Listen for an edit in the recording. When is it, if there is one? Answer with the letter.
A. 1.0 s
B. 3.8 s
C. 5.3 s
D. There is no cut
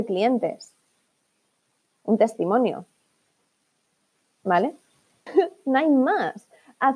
C